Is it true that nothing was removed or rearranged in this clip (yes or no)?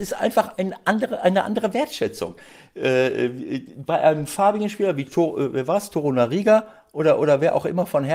yes